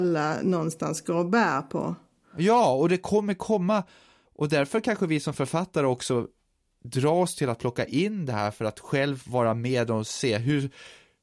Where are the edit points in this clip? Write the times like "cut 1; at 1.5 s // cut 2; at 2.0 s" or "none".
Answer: cut 1; at 4.2 s